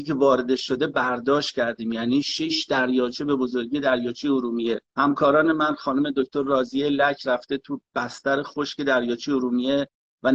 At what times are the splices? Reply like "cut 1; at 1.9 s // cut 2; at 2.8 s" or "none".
cut 1; at 4.9 s